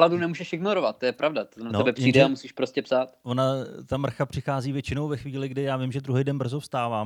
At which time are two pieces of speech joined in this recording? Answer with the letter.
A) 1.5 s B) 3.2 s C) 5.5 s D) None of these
D